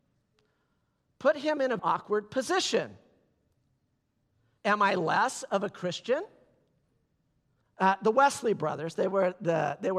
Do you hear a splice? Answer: yes; 3 cuts; at 1.8 s, 4.6 s, 7.6 s

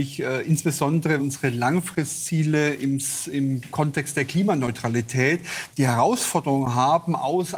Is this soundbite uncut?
no; 3 cuts; at 1.2 s, 3.7 s, 5.7 s

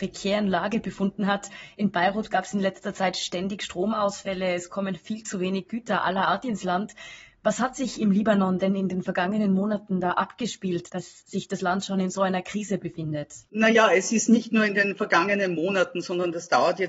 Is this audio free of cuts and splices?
yes; 0 cuts

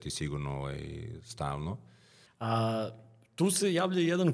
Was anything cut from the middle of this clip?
yes; 1 cut; at 2.3 s

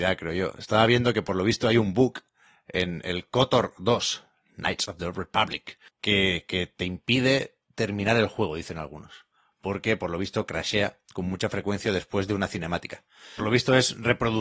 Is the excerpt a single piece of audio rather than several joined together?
no; 2 cuts; at 5.9 s, 13.4 s

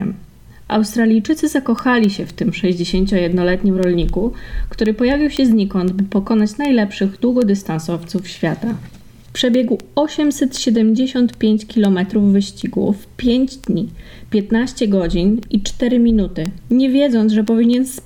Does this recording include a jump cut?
no; 0 cuts

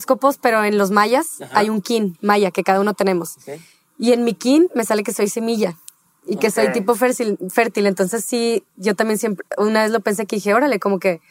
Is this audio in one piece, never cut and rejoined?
yes; 0 cuts

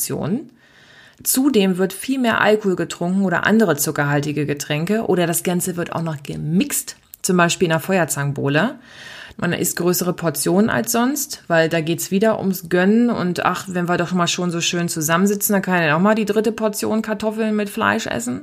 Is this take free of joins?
no; 1 cut; at 9.3 s

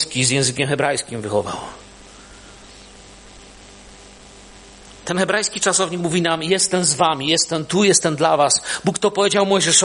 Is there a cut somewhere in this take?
no; 0 cuts

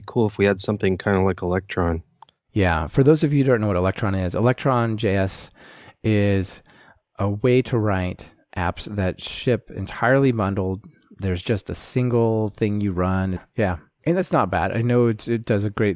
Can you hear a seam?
yes; 1 cut; at 13.4 s

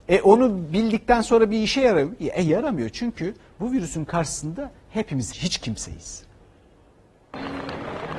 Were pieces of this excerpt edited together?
yes; 1 cut; at 5.3 s

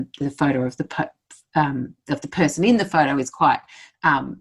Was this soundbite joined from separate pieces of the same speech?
no; 0 cuts

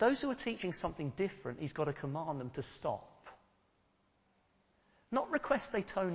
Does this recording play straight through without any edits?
yes; 0 cuts

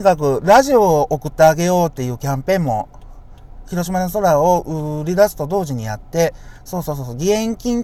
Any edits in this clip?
no; 0 cuts

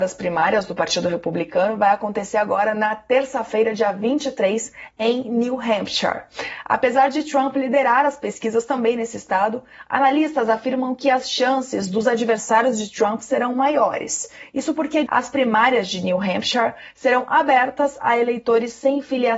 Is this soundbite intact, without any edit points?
no; 1 cut; at 15.1 s

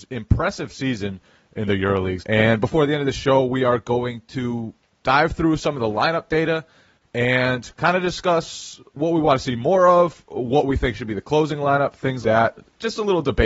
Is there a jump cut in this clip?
yes; 2 cuts; at 2.2 s, 12.2 s

